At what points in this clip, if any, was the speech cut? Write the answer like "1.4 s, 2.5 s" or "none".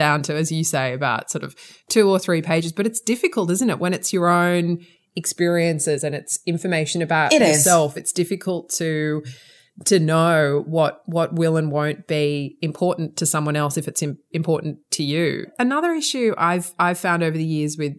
none